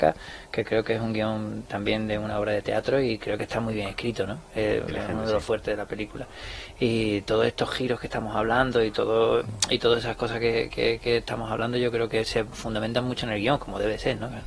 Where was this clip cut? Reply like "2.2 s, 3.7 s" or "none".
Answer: none